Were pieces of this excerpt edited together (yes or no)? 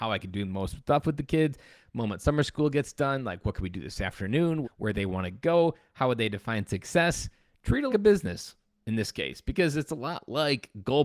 yes